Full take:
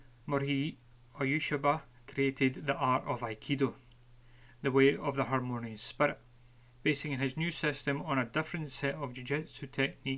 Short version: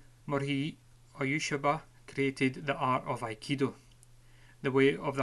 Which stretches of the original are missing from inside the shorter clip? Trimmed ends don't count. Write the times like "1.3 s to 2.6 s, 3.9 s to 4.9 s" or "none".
none